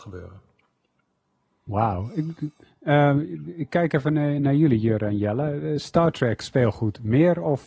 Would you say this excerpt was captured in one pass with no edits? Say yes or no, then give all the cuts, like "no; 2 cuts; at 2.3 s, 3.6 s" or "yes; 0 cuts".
yes; 0 cuts